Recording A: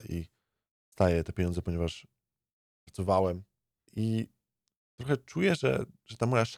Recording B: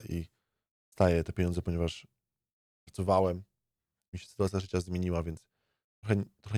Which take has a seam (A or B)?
A